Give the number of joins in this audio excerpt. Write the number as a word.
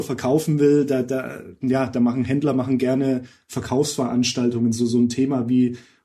zero